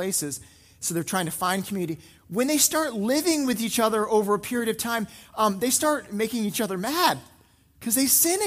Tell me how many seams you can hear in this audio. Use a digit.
0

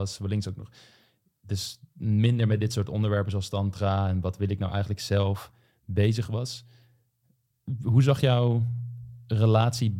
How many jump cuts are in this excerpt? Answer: 0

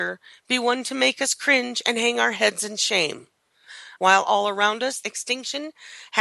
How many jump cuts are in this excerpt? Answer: 2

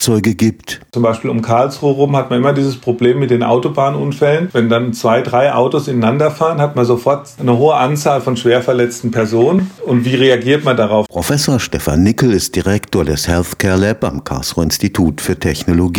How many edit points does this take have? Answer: 1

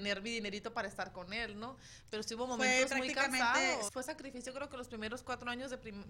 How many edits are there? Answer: 1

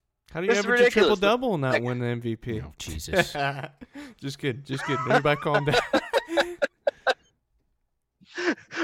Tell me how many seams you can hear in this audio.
0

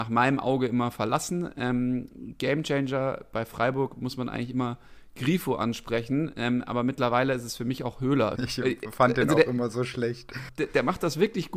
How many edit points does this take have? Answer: 2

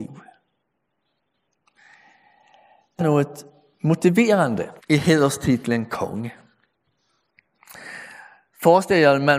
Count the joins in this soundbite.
2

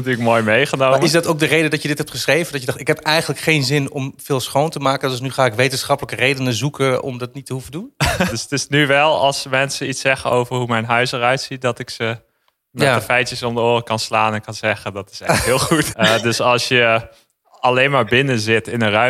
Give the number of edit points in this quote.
2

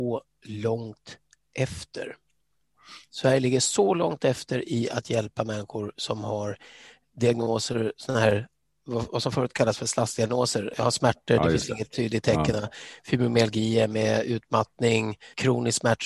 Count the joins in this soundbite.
0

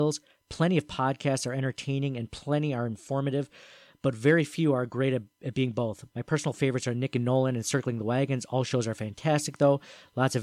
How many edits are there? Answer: 1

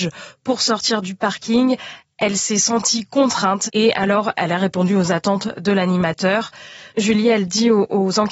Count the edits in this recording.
1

